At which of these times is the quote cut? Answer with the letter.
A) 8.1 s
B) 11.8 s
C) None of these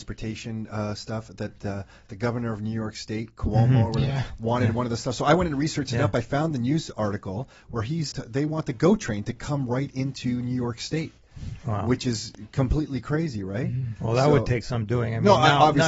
A